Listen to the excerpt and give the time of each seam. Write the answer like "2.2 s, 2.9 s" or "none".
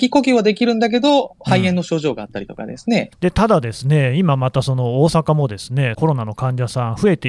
3.1 s, 5.9 s